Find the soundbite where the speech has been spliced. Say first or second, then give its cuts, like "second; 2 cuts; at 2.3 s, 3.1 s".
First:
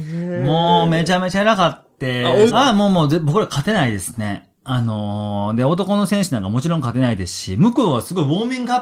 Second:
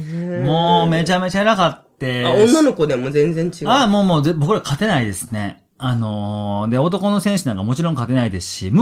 first; 1 cut; at 2.5 s